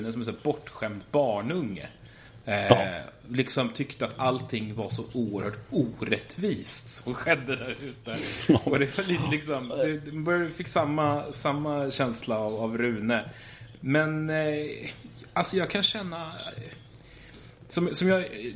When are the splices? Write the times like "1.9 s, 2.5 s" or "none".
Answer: none